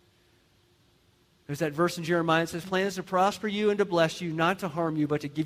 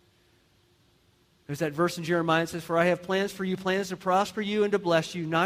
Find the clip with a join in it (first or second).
first